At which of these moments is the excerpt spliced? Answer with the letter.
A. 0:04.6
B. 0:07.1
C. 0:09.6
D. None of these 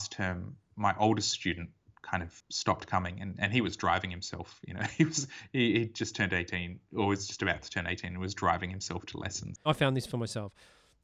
C